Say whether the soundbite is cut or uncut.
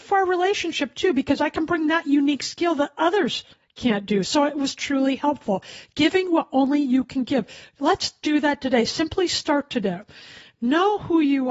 uncut